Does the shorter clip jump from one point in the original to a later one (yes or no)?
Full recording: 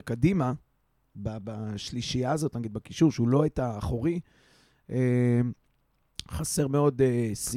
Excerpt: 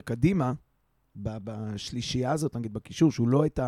no